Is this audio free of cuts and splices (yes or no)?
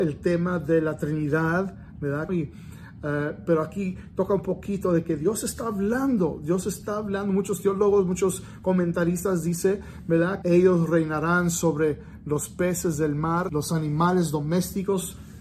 no